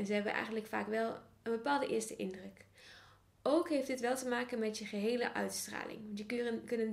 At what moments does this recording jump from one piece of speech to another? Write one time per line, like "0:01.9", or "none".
none